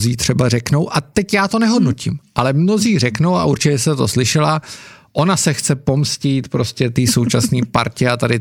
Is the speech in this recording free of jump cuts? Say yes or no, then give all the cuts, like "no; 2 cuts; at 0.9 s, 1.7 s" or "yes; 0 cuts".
yes; 0 cuts